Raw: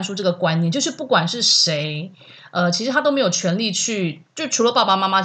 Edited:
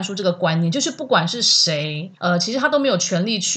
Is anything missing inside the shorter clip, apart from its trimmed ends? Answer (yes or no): yes